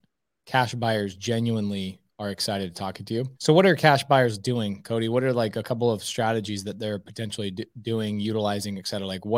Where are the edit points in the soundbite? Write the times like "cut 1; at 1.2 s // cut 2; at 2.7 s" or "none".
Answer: cut 1; at 3.4 s